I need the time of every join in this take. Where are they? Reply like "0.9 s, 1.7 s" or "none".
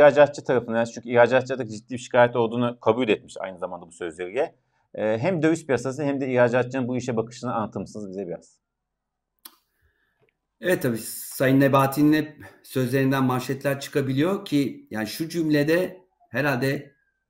none